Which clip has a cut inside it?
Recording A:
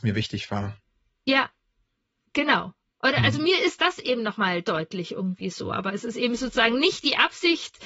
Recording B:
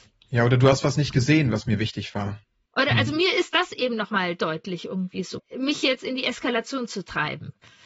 B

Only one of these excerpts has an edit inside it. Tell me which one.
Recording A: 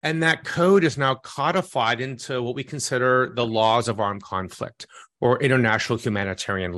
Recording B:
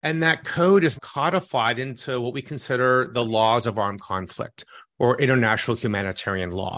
B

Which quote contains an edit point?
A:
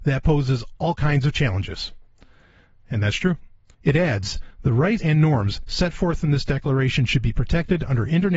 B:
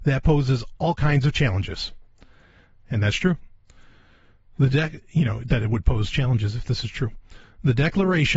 A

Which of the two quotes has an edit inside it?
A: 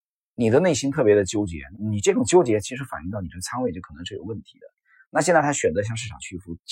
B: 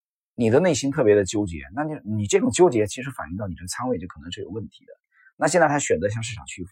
A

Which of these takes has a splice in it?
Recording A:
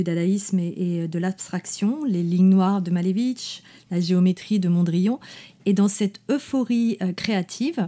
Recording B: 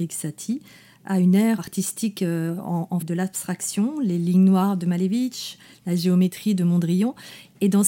B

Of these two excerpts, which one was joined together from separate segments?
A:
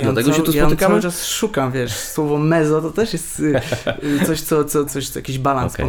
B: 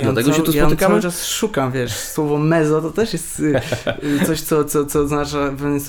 A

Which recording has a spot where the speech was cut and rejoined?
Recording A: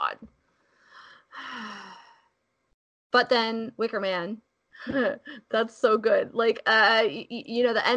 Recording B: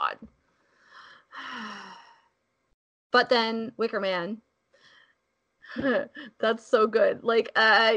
A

